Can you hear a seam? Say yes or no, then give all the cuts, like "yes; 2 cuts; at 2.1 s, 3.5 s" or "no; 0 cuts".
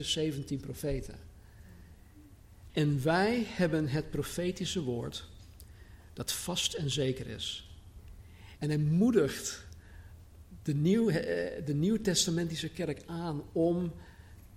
yes; 2 cuts; at 2.7 s, 8.6 s